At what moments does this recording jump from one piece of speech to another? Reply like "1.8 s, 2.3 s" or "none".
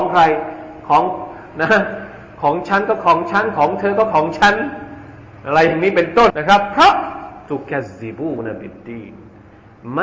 6.3 s

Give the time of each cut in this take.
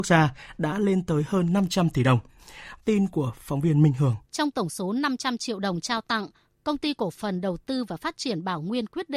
2.8 s, 4.2 s

